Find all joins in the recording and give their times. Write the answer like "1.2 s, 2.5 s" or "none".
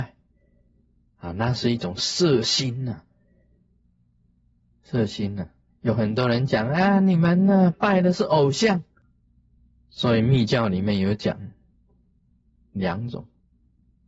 none